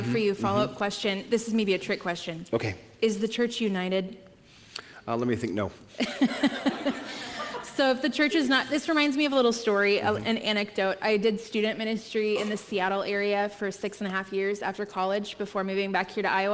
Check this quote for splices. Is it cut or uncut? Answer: uncut